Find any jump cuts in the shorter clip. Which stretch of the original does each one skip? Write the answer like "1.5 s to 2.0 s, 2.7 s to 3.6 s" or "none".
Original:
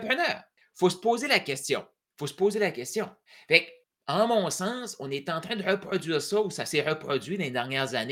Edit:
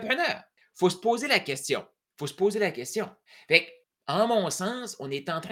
none